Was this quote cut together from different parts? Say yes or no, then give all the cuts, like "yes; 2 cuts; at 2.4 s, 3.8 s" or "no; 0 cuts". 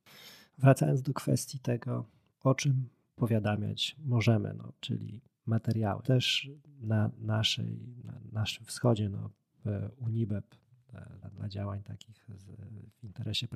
yes; 3 cuts; at 4.8 s, 6.0 s, 11.2 s